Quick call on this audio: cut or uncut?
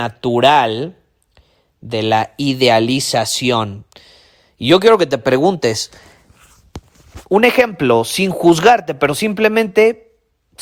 uncut